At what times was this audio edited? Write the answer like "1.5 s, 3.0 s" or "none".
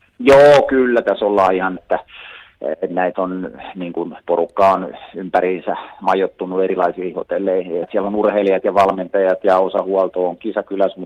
1.8 s, 7.8 s